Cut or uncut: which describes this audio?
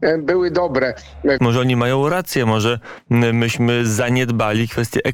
cut